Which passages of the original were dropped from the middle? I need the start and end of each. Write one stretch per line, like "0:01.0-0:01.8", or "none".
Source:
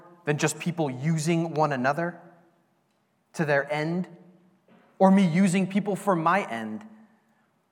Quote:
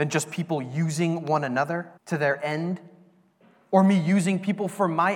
0:02.2-0:03.2